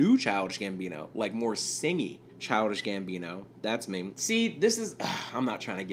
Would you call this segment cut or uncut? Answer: cut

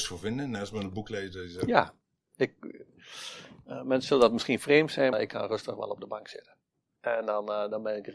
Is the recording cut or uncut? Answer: cut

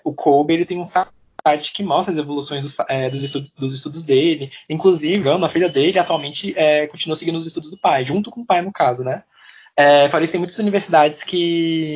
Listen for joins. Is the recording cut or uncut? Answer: uncut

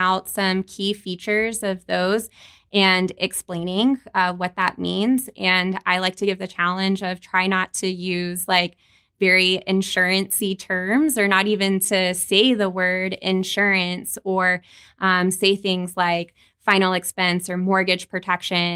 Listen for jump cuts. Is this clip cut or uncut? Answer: uncut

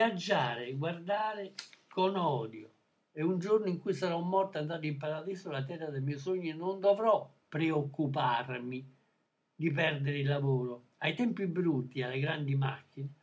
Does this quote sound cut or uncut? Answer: uncut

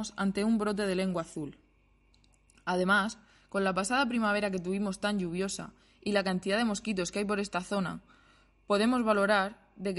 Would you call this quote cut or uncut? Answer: uncut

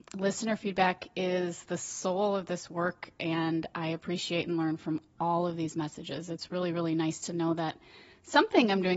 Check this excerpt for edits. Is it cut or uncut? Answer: uncut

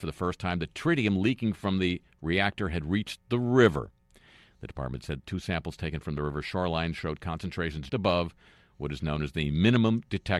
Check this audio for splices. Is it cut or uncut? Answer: cut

